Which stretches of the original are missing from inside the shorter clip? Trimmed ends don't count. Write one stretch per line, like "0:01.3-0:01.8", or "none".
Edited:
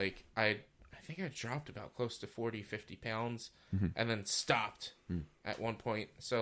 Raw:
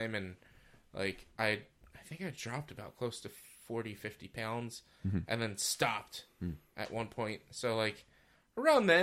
0:03.4-0:03.6